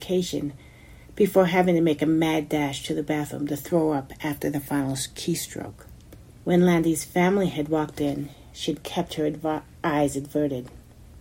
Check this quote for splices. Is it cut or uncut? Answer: cut